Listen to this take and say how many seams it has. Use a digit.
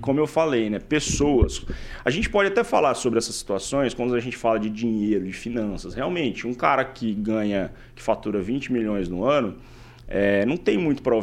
0